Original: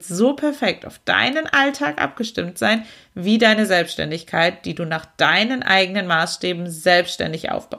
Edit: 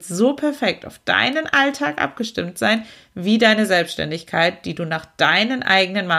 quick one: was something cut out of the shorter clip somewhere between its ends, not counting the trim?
no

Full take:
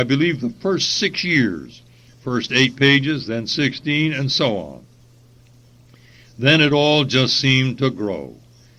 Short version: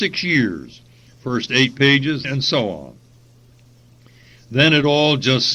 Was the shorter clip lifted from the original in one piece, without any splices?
no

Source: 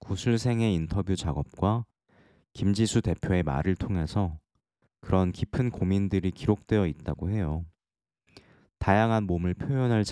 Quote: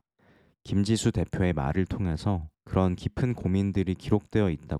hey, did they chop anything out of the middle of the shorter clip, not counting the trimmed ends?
yes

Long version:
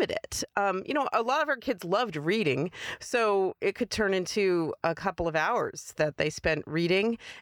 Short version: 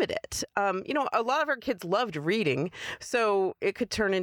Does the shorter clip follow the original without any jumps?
yes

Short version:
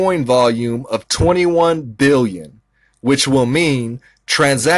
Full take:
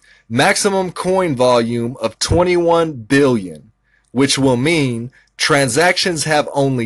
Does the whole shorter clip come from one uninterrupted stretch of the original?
yes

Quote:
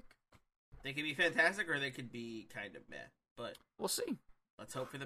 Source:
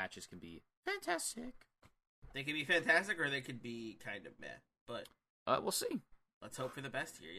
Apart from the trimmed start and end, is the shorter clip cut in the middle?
yes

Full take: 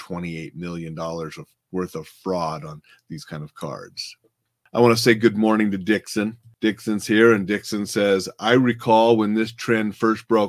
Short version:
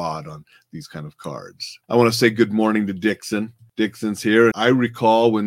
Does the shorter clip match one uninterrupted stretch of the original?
no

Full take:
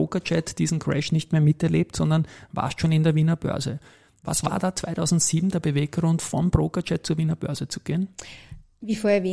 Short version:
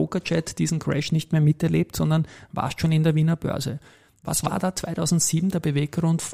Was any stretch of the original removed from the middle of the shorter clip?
no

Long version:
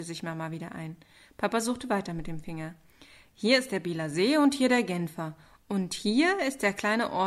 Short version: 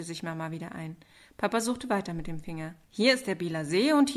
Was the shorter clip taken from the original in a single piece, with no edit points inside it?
no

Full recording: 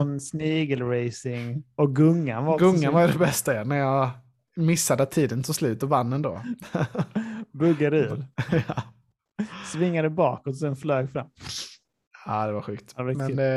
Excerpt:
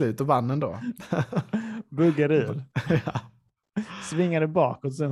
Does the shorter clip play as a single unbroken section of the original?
yes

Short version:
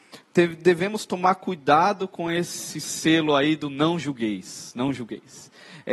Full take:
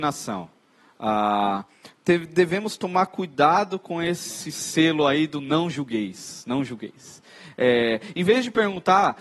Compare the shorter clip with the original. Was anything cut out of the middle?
no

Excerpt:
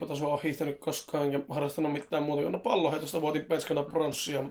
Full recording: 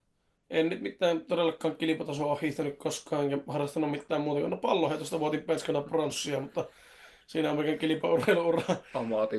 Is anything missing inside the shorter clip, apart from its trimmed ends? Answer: no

